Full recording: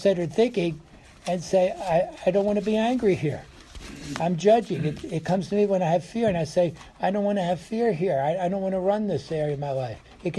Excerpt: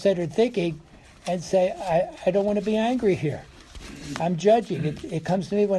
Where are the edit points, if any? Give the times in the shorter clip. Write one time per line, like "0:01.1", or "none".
none

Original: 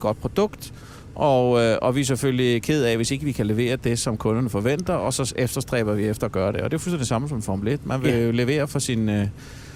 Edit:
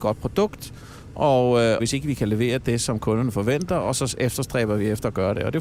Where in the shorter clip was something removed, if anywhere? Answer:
0:01.8

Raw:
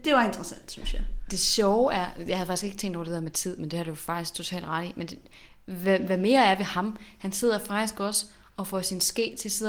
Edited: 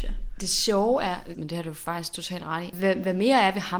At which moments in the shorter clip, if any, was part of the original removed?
0:01.3
0:02.7

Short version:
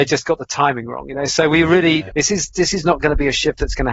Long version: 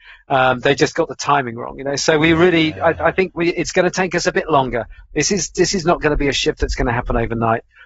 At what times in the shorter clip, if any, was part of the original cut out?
0:02.1

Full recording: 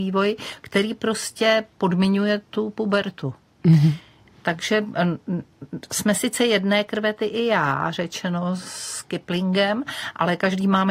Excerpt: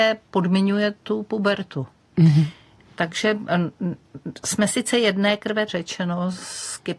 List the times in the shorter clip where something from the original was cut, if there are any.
0:05.7

